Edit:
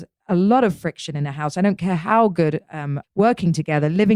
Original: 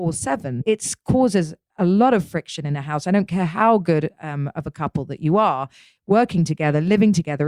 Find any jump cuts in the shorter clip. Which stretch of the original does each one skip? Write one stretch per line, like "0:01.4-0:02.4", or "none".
0:04.5-0:05.9